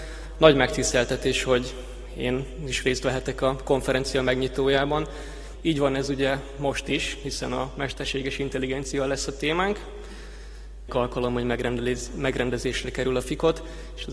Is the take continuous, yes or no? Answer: no